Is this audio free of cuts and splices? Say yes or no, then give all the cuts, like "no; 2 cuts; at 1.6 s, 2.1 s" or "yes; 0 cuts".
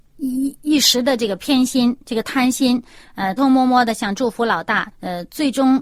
no; 2 cuts; at 3.4 s, 4.9 s